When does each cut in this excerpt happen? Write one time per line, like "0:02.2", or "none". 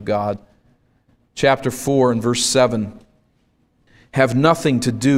none